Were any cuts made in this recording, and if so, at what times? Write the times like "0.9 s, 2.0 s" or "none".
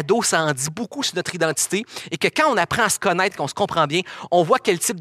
none